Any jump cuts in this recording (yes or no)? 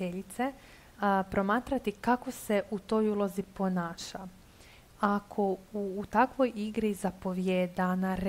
no